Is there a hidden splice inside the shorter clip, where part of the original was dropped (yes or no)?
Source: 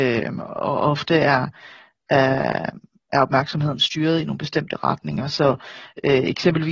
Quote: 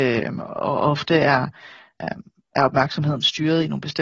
yes